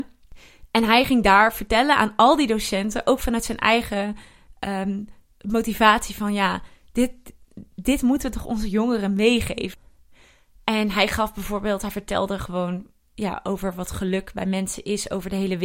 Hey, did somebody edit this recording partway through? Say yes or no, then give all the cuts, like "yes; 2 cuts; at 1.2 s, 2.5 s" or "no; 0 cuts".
no; 0 cuts